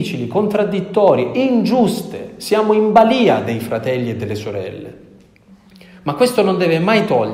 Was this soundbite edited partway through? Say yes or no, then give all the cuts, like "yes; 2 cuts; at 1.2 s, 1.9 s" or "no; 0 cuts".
no; 0 cuts